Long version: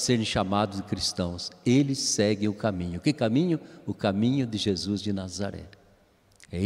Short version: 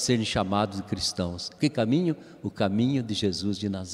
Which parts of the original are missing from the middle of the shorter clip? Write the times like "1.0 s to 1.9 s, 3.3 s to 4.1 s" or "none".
1.6 s to 3.0 s

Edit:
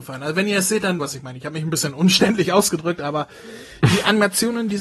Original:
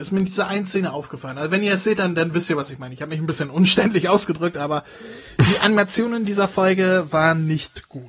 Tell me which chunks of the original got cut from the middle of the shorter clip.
2.1 s to 2.6 s

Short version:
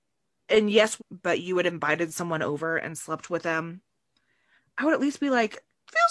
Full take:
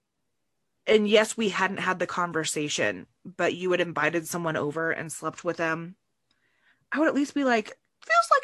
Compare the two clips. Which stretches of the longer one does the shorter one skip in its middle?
1.4 s to 3.1 s

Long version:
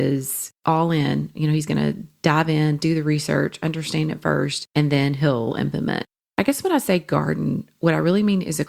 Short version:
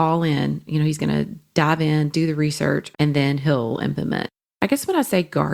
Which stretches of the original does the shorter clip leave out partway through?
3.6 s to 4.7 s

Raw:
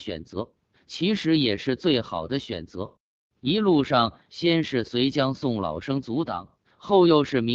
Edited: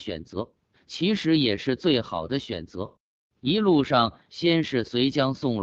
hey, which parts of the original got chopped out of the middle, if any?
none

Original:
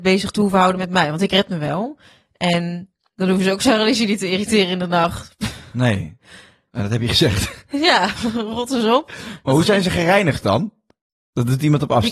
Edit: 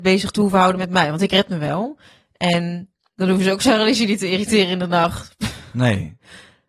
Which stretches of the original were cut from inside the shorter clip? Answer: none

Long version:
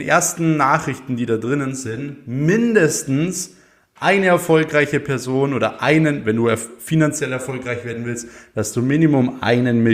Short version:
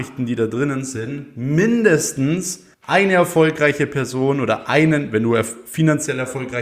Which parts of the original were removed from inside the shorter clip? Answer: 3.6 s to 3.9 s

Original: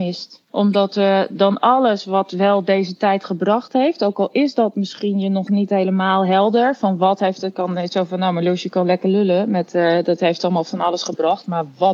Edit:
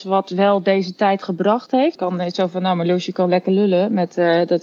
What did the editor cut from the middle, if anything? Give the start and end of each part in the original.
4.0 s to 7.5 s

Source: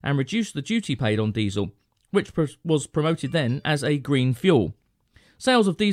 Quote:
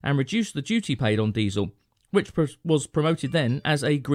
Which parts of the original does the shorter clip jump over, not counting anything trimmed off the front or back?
none

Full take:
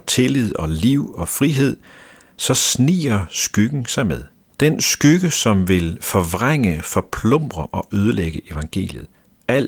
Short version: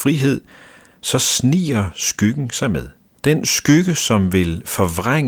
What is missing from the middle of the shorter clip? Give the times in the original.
none

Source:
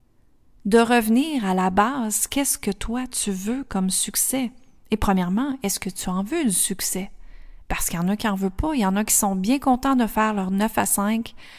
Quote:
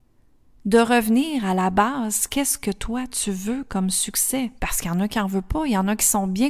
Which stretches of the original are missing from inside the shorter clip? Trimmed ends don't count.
4.6 s to 7.7 s

